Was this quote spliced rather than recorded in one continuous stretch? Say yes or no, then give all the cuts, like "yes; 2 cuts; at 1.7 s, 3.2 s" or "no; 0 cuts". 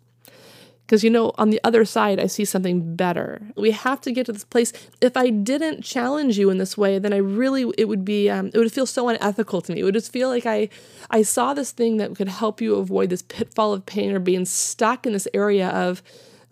yes; 1 cut; at 3.6 s